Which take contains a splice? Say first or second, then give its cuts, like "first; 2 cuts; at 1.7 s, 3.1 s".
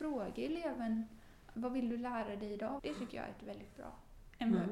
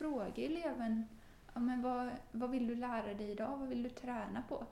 first; 2 cuts; at 1.5 s, 2.8 s